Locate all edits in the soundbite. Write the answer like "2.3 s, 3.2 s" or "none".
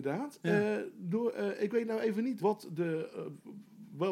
2.4 s